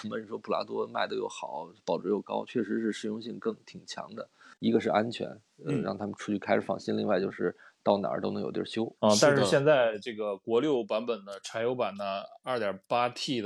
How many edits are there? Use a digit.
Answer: 2